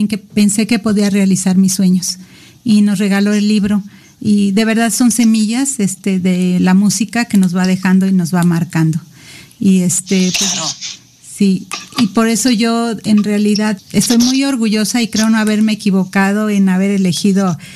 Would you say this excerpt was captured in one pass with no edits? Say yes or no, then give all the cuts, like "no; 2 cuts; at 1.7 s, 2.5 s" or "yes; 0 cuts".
no; 1 cut; at 13.8 s